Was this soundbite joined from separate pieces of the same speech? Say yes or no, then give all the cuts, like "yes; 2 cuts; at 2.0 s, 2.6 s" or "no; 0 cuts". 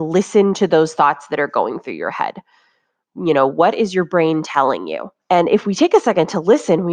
yes; 1 cut; at 5.2 s